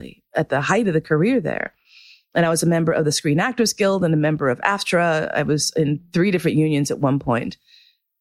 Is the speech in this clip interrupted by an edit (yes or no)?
no